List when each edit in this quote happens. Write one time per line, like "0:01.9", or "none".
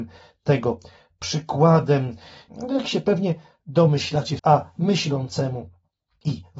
0:02.5
0:04.4